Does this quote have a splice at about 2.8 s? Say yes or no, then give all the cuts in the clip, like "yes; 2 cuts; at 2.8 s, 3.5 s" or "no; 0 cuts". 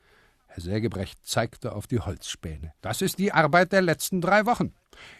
yes; 1 cut; at 2.8 s